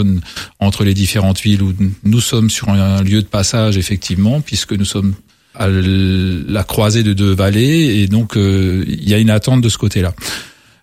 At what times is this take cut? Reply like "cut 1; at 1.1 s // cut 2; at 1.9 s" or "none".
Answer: cut 1; at 5.5 s